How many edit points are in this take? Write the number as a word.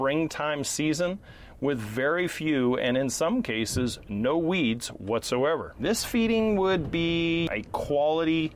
one